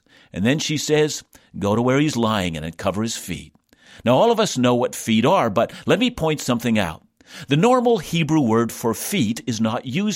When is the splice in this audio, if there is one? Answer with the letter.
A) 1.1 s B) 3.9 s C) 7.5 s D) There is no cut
D